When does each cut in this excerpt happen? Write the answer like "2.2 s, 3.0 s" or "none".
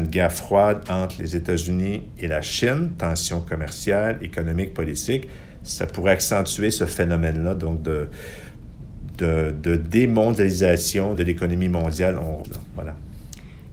11.2 s, 12.4 s